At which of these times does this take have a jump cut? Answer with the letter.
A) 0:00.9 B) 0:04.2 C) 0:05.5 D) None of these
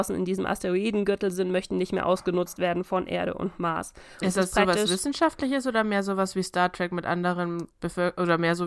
B